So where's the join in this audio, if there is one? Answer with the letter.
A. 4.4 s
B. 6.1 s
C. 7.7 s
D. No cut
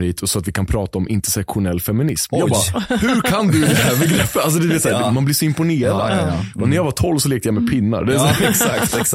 D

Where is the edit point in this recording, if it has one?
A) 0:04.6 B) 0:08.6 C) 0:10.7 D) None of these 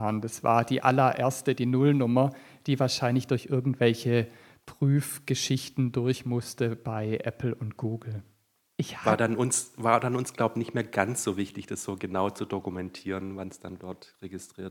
B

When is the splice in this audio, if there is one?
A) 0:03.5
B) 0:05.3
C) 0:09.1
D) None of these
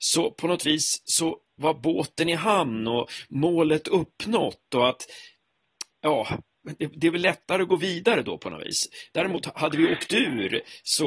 D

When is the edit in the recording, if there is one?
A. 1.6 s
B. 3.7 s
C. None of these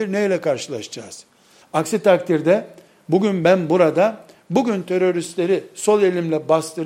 A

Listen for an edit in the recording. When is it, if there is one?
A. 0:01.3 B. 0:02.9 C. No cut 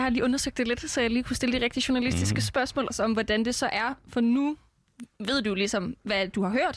B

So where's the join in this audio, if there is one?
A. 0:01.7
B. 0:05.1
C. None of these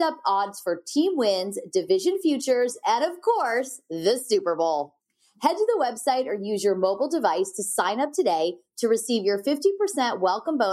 C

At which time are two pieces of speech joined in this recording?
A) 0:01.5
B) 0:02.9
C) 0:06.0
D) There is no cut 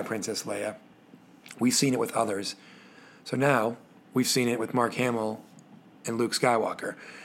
D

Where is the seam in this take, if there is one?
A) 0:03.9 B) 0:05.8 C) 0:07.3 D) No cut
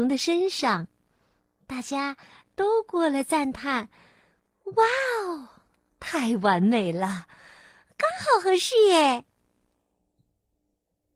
D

